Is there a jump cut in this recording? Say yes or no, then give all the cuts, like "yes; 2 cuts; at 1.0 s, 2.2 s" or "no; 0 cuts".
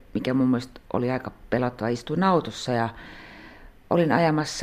no; 0 cuts